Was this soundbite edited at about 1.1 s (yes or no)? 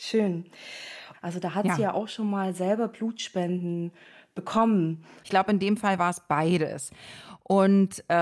yes